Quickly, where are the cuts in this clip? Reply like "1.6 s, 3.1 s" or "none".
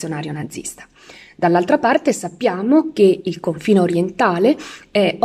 none